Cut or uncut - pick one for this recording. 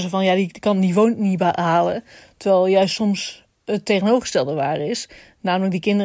uncut